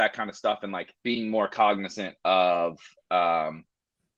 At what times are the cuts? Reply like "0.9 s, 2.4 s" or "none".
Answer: 0.9 s